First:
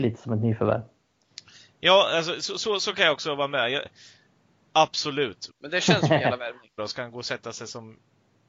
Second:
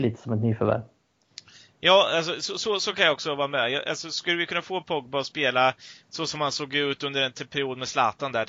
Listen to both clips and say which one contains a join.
first; 3 cuts; at 3.8 s, 5.5 s, 6.8 s

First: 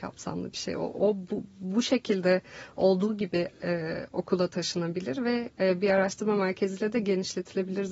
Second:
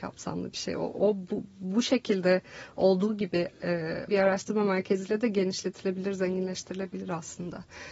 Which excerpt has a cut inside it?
second; 1 cut; at 4.1 s

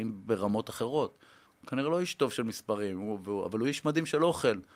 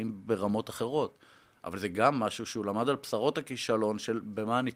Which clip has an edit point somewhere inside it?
first; 1 cut; at 1.4 s

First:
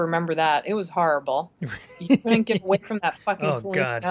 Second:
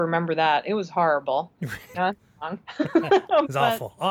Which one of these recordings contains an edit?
second; 1 cut; at 1.9 s

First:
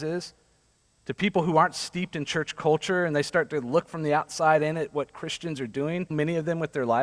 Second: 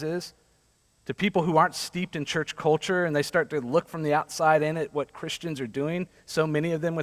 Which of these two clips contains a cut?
first; 1 cut; at 6.1 s

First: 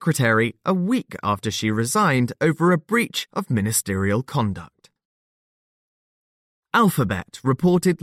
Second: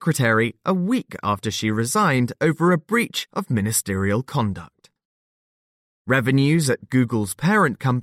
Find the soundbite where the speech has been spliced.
second; 1 cut; at 5.9 s

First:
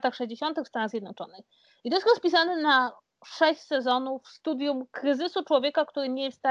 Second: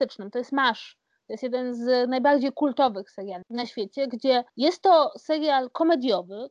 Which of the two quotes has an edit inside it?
second; 2 cuts; at 3.4 s, 4.5 s

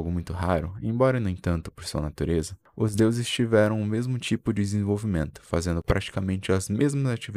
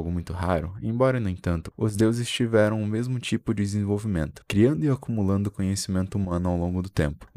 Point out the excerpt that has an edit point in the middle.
second; 2 cuts; at 1.7 s, 4.4 s

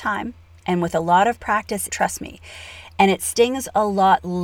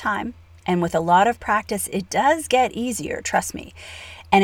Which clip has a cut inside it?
first; 1 cut; at 1.9 s

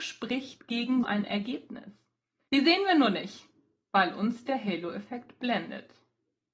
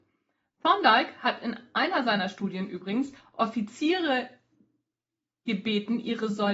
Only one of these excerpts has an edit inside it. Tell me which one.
first; 2 cuts; at 1.0 s, 2.5 s

